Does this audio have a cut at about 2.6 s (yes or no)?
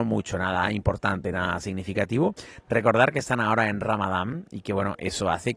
no